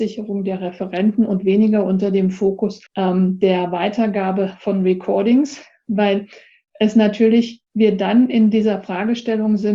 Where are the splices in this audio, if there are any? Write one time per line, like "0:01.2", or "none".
0:02.9
0:07.7